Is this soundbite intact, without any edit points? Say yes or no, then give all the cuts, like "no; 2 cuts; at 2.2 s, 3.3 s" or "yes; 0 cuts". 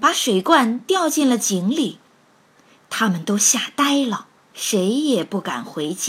no; 1 cut; at 4.4 s